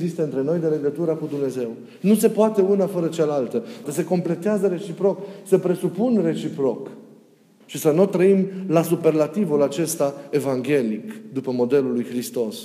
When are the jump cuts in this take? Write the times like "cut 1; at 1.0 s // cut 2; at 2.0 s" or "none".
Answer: cut 1; at 3.8 s // cut 2; at 7.6 s